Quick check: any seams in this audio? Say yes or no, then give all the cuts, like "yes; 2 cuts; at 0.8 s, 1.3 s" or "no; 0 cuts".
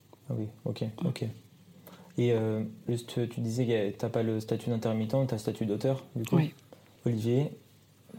yes; 2 cuts; at 1.0 s, 7.0 s